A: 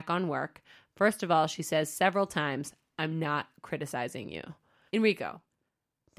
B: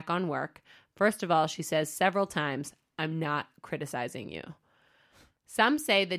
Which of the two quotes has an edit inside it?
A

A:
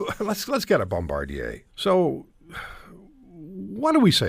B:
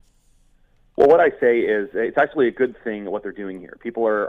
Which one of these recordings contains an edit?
A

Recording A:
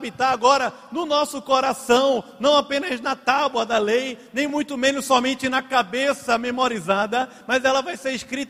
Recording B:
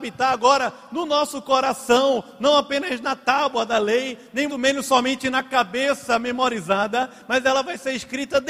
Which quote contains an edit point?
B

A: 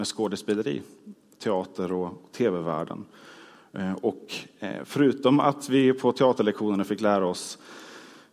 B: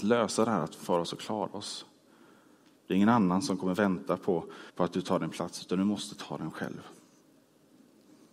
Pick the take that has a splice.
B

